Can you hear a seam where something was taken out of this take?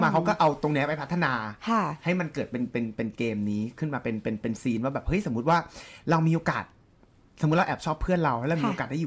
no; 0 cuts

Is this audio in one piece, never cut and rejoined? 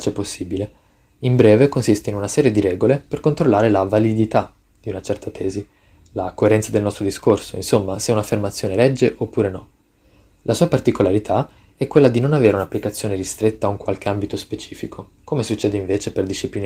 yes; 0 cuts

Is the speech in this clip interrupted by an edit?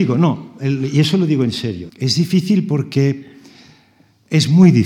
yes; 1 cut; at 1.9 s

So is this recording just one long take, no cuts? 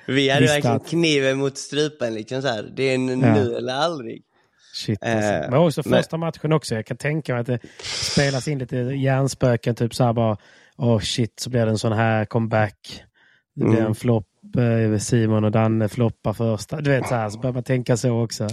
yes; 0 cuts

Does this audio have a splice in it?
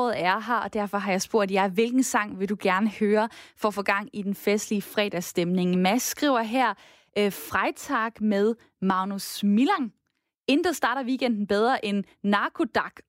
no; 0 cuts

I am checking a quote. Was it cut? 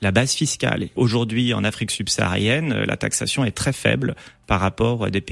yes; 1 cut; at 1.0 s

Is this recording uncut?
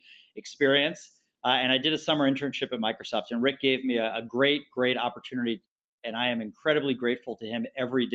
yes; 0 cuts

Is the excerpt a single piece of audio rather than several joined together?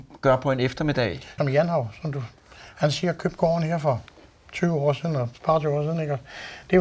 no; 1 cut; at 1.4 s

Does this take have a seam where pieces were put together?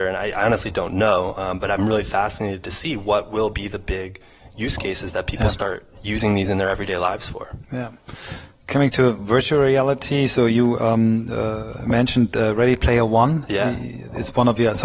no; 0 cuts

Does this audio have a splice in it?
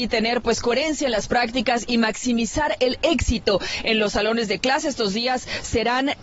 no; 0 cuts

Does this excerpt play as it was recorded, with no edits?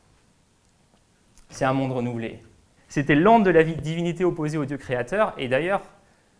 no; 1 cut; at 2.8 s

